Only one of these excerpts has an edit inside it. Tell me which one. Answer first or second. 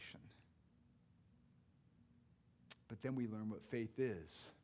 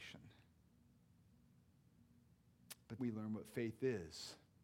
second